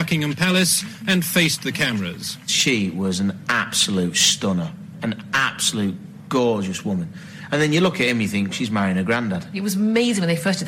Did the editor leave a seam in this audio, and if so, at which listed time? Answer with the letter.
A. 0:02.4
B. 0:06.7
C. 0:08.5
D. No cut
C